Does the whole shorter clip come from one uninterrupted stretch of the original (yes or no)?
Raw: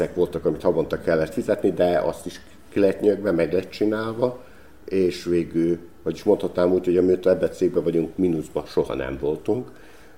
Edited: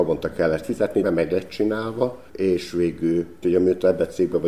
no